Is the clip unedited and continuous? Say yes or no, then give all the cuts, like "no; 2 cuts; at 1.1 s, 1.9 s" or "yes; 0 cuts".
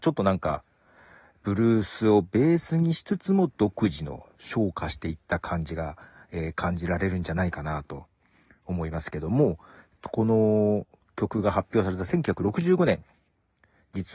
yes; 0 cuts